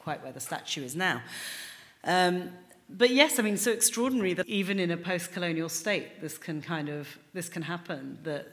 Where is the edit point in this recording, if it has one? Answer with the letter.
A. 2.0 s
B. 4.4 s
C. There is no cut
B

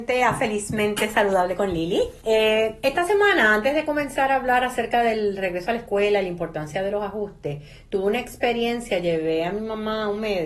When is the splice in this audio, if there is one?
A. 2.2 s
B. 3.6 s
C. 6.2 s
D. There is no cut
A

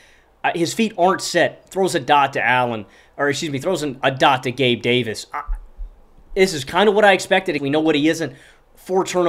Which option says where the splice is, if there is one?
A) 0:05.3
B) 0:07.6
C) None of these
B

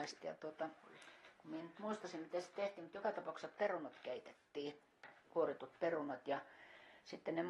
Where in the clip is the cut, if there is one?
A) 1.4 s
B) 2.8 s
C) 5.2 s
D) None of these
C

